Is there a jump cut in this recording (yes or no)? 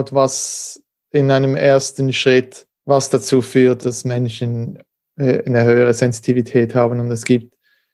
yes